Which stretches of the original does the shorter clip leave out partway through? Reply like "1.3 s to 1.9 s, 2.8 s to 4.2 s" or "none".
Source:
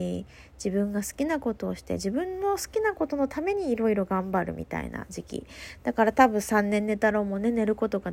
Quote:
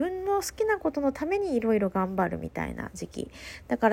none

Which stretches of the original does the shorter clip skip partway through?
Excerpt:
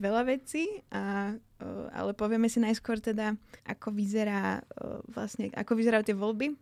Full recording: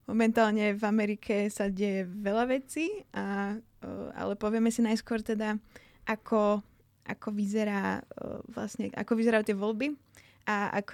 5.8 s to 7.0 s

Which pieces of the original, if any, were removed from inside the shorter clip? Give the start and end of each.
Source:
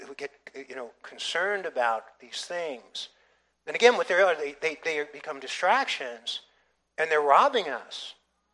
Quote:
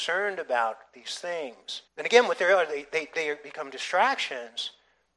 3.1 s to 3.6 s

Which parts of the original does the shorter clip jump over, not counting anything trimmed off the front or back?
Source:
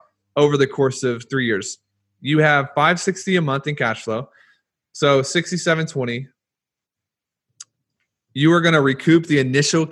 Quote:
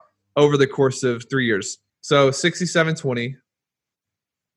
1.9 s to 4.8 s

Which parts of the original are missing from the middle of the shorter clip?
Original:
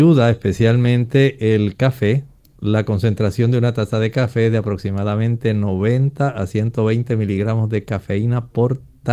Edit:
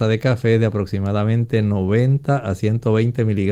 none

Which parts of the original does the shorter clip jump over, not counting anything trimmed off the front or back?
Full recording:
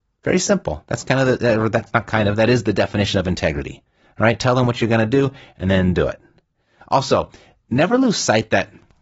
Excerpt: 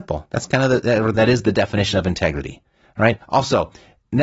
1.7 s to 2.3 s, 4.4 s to 6.8 s

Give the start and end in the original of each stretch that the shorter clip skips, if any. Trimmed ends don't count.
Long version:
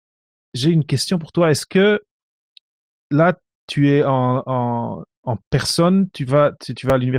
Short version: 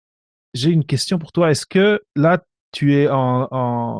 2.0 s to 3.0 s

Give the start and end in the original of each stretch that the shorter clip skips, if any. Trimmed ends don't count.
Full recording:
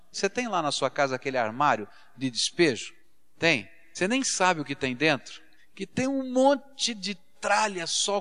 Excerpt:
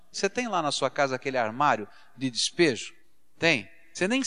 none

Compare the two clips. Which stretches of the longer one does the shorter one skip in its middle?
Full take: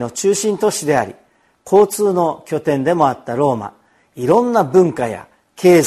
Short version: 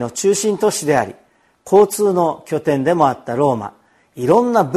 none

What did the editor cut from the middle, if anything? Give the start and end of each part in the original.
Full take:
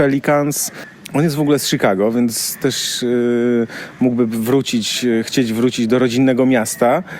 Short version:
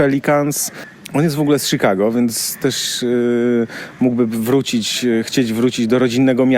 none

